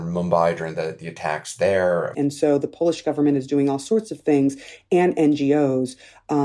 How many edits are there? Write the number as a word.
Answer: one